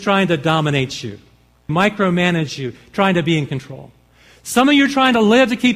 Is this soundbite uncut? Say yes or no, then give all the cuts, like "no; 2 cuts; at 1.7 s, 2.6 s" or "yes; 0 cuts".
no; 1 cut; at 1.7 s